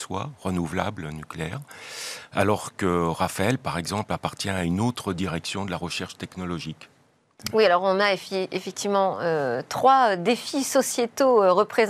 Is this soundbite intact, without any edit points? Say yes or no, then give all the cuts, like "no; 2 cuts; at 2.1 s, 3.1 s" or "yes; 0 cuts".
yes; 0 cuts